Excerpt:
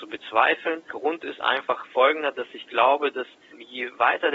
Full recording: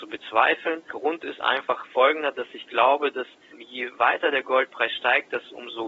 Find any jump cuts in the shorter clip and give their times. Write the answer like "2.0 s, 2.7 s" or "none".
none